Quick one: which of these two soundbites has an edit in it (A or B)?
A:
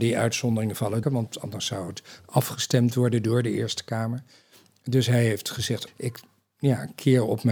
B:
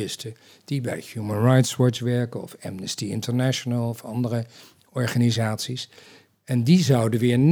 A